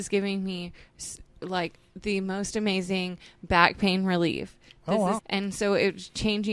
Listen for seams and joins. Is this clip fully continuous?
no; 1 cut; at 5.2 s

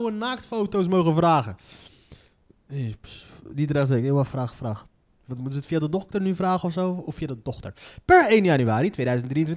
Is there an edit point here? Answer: no; 0 cuts

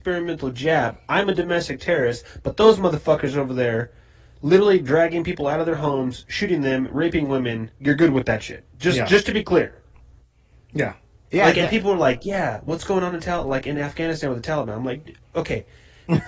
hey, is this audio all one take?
yes; 0 cuts

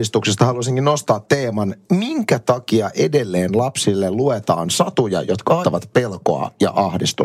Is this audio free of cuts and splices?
no; 1 cut; at 5.6 s

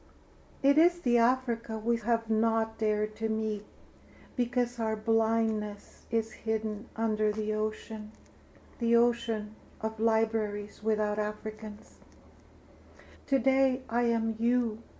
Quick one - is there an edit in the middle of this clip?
yes; 2 cuts; at 2.0 s, 13.1 s

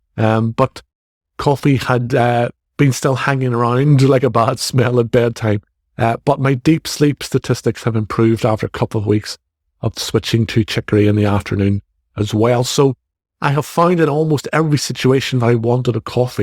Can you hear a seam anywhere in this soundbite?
no; 0 cuts

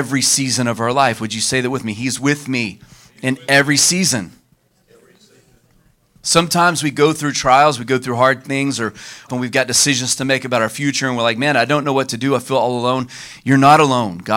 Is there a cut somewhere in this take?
yes; 1 cut; at 9.3 s

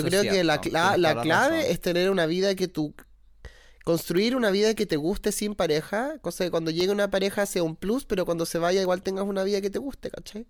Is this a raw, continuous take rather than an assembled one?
yes; 0 cuts

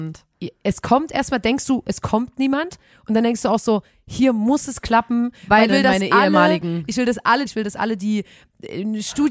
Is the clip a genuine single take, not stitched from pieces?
no; 2 cuts; at 5.7 s, 7.5 s

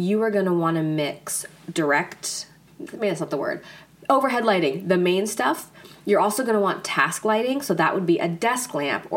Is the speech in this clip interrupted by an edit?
yes; 1 cut; at 2.7 s

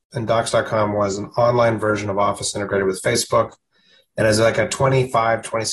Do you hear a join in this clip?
no; 0 cuts

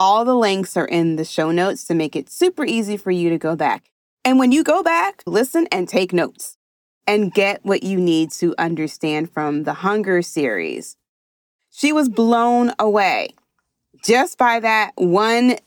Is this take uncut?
no; 2 cuts; at 5.3 s, 11.6 s

